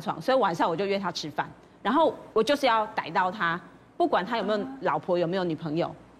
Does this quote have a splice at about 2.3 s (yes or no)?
yes